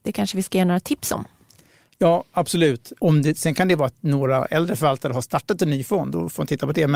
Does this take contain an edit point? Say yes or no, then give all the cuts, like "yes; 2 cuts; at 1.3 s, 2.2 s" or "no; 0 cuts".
yes; 1 cut; at 3.0 s